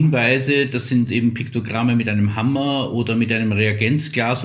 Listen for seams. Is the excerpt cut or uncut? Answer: uncut